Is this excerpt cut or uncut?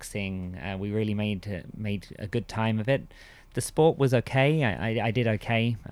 uncut